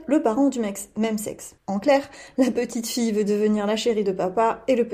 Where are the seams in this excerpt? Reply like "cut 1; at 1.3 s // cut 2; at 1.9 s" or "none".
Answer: cut 1; at 1.6 s